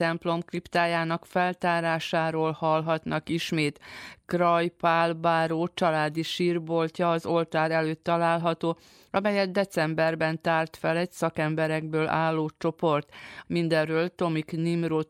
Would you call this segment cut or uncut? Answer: cut